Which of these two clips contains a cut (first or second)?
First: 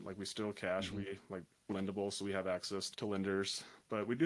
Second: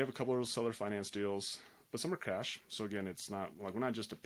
first